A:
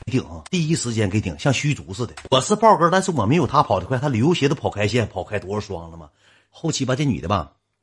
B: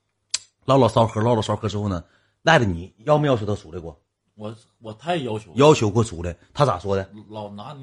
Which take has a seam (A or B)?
A